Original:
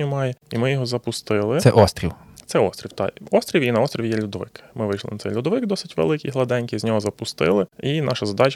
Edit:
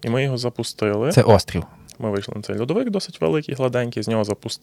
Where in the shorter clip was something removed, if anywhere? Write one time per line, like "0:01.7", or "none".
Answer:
0:02.0